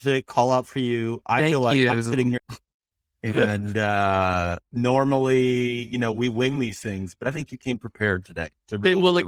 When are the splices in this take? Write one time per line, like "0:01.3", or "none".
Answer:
0:02.4